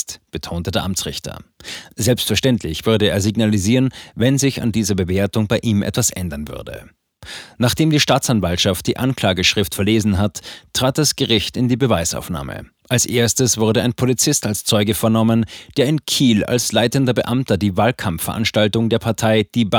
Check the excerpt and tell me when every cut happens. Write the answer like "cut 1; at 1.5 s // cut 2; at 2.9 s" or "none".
none